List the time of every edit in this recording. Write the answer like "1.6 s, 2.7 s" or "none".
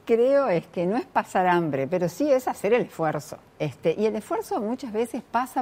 3.5 s